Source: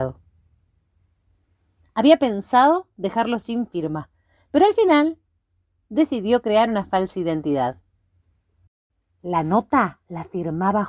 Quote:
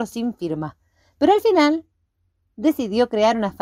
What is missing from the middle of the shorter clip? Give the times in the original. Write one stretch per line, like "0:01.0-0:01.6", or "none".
none